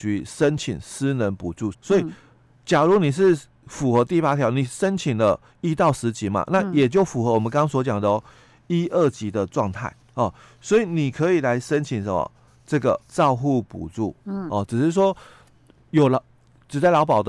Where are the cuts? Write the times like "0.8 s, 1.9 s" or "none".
1.7 s, 10.0 s, 13.0 s